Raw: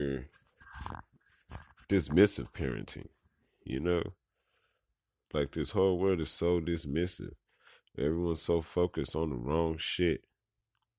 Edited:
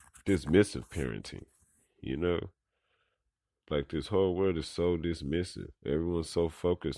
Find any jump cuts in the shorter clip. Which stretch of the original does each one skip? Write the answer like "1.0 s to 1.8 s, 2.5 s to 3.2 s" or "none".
7.4 s to 7.9 s